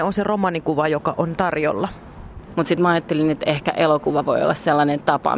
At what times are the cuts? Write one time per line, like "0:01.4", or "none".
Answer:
0:02.5